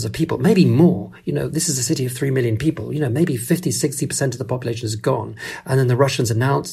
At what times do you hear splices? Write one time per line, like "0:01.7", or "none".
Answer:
none